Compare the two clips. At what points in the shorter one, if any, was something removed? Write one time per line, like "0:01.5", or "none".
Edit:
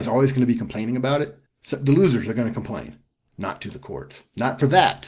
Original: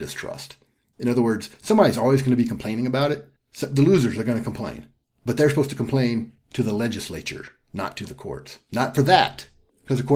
0:03.3